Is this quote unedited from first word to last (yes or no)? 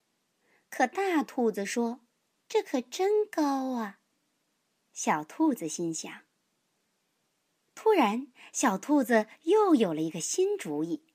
no